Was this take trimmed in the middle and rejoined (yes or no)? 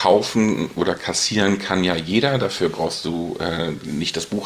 no